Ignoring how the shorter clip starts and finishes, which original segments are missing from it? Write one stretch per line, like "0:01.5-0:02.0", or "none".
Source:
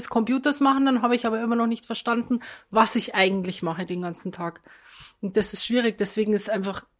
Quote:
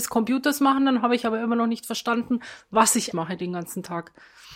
0:03.1-0:03.6